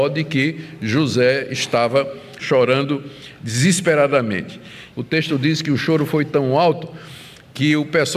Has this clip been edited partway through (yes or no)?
yes